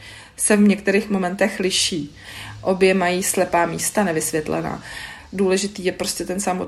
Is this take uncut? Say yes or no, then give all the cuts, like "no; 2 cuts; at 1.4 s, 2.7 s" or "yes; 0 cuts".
no; 1 cut; at 5.2 s